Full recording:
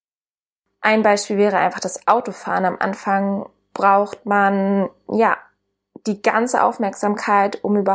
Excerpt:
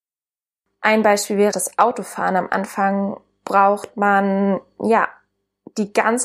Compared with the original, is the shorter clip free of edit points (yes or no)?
no